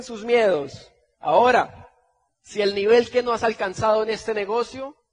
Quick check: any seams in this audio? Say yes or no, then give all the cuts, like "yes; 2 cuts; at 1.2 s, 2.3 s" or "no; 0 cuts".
yes; 1 cut; at 2.3 s